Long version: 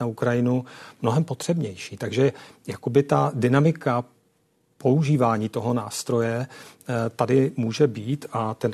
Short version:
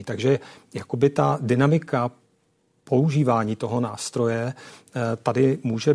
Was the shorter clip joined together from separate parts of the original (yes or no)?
no